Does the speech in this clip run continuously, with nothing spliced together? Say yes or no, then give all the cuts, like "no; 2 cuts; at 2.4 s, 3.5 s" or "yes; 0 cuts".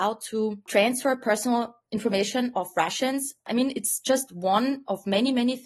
yes; 0 cuts